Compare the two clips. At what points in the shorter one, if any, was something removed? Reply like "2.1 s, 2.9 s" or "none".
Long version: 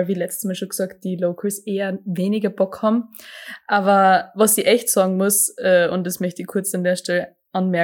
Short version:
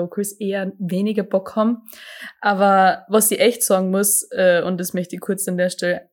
none